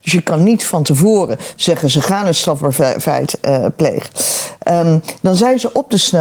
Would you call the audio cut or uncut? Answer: uncut